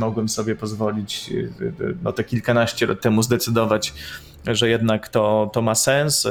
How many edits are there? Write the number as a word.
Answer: zero